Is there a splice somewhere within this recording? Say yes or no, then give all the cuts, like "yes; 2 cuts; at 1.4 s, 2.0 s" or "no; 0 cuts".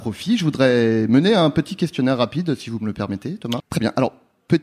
yes; 1 cut; at 3.6 s